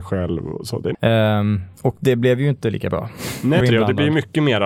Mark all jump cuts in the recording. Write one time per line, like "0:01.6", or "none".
0:00.9
0:03.6